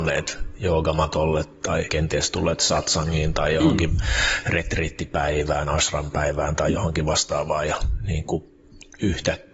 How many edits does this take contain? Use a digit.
0